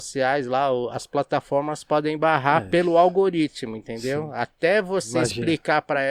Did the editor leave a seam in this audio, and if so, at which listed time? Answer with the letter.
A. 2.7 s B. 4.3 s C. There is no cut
C